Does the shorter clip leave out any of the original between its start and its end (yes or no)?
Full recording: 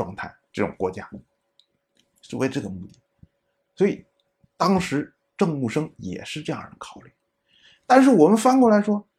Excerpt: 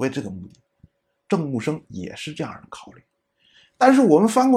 yes